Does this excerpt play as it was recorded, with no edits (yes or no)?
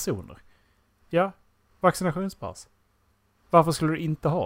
yes